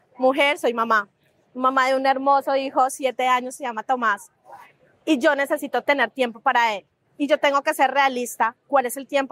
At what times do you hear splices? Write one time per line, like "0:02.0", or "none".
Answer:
none